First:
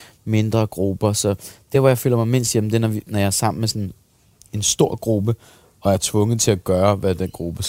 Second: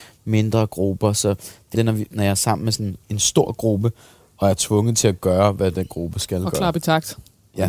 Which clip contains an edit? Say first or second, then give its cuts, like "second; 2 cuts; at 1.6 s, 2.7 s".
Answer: second; 2 cuts; at 1.7 s, 3.0 s